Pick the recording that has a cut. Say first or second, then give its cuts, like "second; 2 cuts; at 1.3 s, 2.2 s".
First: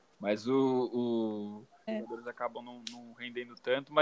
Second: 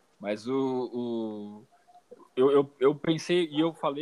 first; 1 cut; at 1.9 s